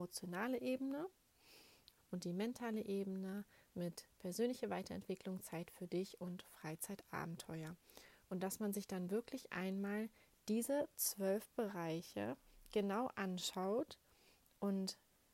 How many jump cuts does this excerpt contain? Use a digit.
1